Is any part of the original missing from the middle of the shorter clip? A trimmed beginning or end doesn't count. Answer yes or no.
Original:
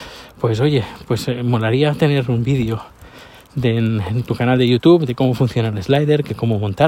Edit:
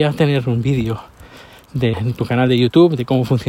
yes